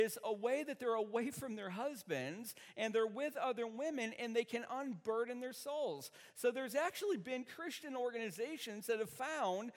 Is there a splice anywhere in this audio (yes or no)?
no